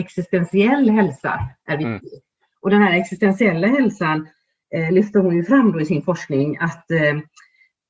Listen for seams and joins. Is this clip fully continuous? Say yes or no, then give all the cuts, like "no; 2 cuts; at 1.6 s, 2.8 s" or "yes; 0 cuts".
yes; 0 cuts